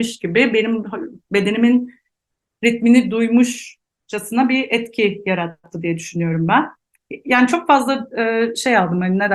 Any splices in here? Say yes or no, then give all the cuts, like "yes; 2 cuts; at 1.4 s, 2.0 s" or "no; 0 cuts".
no; 0 cuts